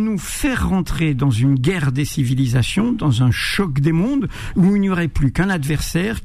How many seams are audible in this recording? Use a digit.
0